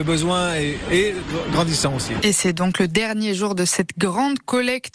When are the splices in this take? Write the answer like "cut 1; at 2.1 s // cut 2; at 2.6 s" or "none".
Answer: cut 1; at 2.2 s